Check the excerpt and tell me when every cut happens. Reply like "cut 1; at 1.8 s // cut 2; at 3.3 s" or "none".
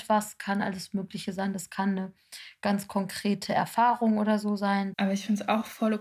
cut 1; at 4.9 s

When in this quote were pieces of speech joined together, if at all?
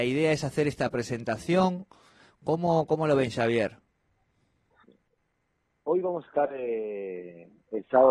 cut 1; at 4.8 s

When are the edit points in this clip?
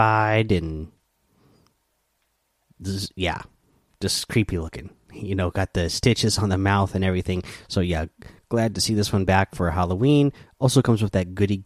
none

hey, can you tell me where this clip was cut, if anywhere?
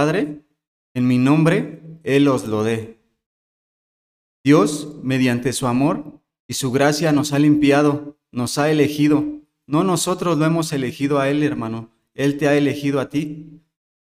none

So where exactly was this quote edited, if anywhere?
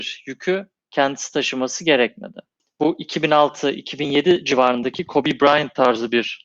none

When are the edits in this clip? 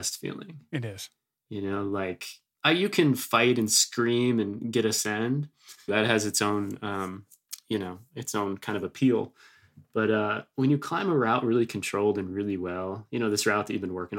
cut 1; at 5.9 s

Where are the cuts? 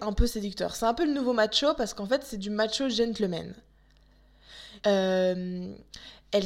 cut 1; at 4.8 s

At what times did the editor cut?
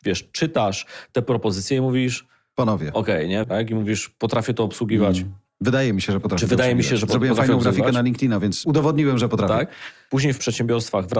cut 1; at 3.4 s

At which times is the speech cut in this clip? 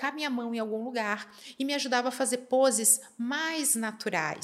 none

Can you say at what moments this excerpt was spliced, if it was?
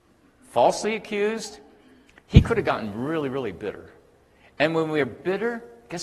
none

